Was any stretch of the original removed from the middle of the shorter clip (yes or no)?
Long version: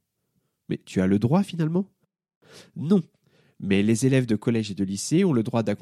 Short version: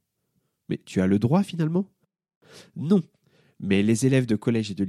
no